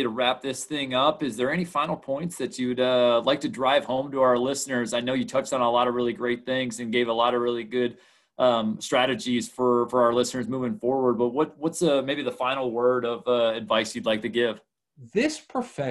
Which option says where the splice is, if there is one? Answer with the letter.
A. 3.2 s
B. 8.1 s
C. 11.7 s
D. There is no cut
D